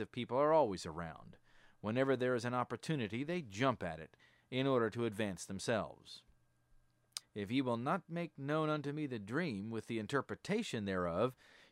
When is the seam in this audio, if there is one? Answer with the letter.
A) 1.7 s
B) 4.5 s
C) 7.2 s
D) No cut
C